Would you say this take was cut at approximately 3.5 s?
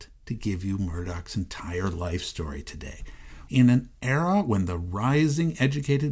yes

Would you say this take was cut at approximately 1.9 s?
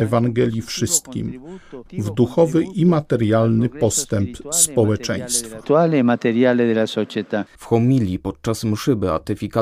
yes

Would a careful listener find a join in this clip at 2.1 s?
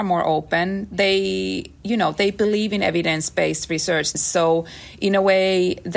no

